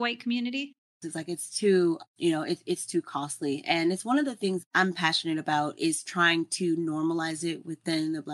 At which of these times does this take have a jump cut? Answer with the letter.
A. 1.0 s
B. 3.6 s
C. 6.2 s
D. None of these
A